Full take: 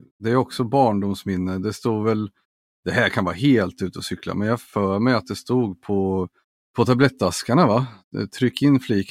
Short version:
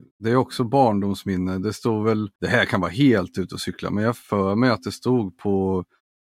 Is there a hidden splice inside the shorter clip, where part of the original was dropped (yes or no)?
yes